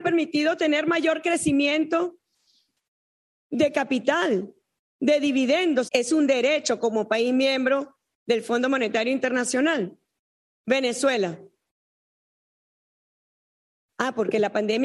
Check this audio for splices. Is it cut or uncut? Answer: cut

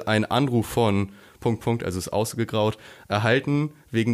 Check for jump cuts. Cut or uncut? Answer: cut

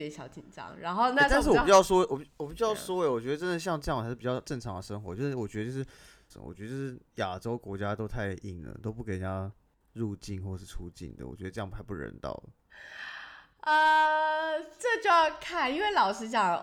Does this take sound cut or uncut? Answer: cut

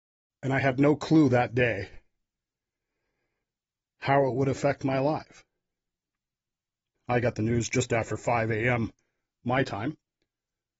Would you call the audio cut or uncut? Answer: cut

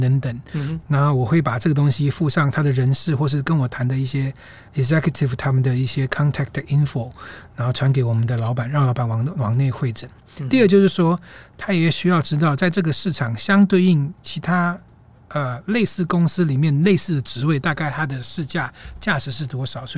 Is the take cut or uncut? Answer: uncut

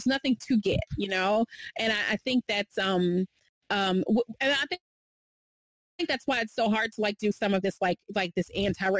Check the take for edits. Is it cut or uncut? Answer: uncut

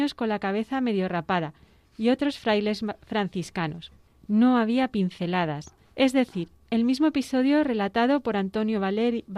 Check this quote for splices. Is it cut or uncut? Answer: cut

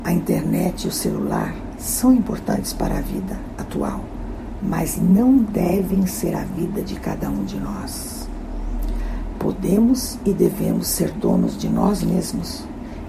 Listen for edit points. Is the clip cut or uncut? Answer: uncut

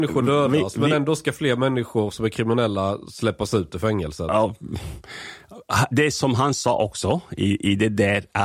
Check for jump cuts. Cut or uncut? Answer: uncut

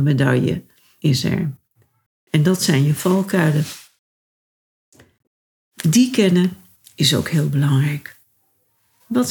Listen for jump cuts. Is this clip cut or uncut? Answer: uncut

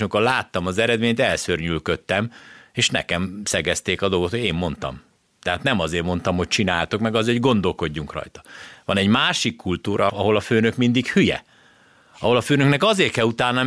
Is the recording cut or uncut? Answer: cut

